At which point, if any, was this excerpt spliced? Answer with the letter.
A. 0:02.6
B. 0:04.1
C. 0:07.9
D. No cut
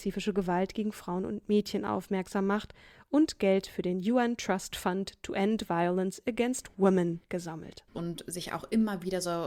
C